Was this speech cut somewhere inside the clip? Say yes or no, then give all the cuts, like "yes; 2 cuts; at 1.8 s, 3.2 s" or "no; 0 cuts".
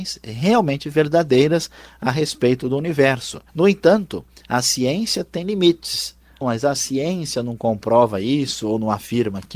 yes; 2 cuts; at 3.5 s, 6.4 s